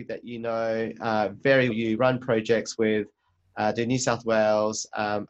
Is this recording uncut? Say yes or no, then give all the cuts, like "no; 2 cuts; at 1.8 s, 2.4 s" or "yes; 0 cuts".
no; 1 cut; at 1.7 s